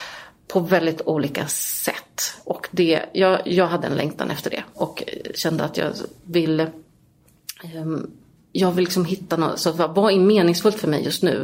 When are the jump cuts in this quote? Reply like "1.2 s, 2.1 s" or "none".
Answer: none